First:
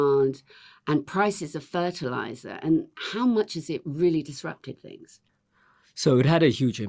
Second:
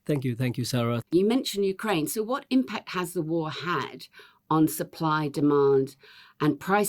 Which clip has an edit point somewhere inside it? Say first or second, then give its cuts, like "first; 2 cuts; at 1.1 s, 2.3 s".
second; 1 cut; at 1.0 s